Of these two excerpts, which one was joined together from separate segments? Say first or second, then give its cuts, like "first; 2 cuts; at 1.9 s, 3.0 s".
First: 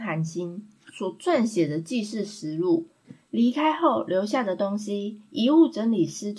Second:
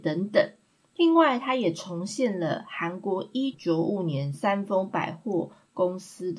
second; 1 cut; at 3.5 s